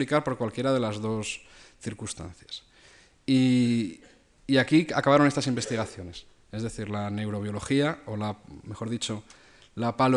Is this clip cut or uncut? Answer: uncut